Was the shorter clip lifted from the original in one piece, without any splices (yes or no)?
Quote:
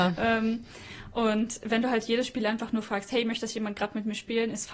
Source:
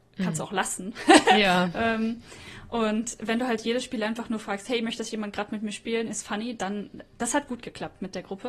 yes